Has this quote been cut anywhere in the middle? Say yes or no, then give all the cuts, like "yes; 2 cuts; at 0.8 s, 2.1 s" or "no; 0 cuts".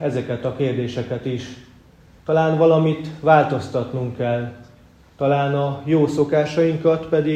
no; 0 cuts